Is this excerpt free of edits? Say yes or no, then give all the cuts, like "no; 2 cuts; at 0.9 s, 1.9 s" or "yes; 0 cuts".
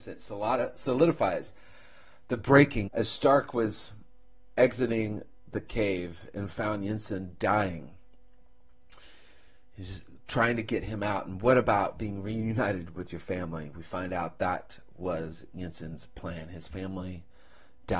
no; 1 cut; at 2.9 s